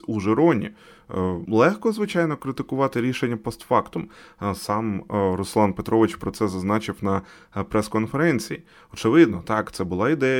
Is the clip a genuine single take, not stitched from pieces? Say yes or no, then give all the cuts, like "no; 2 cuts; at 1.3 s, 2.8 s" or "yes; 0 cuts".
no; 1 cut; at 1.4 s